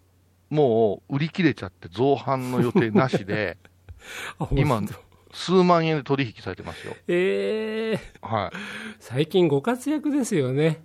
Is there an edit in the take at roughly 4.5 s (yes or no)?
no